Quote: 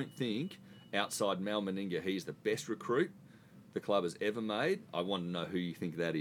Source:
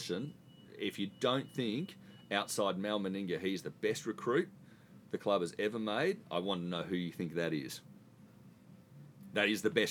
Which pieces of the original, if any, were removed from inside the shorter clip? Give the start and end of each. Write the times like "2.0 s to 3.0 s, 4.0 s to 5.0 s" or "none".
none